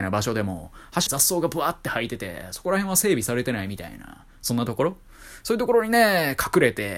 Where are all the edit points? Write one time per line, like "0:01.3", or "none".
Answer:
0:01.1